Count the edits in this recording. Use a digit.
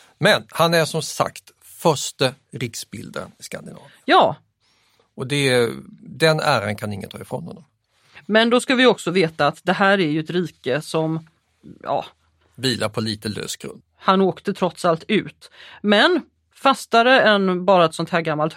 1